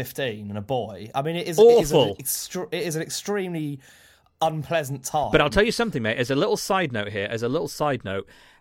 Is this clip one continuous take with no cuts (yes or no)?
yes